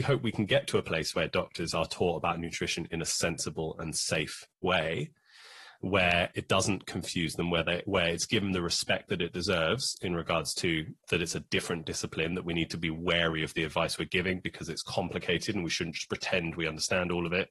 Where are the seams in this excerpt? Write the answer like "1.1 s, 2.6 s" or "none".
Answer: none